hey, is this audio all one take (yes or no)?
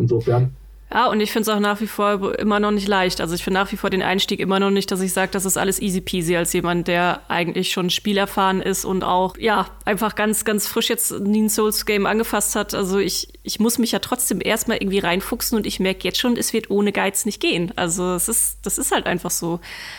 yes